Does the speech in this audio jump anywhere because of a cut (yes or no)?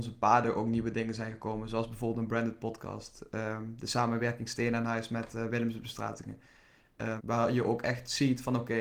yes